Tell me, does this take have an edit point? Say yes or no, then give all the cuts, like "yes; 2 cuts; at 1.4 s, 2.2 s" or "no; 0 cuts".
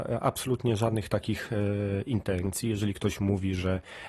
no; 0 cuts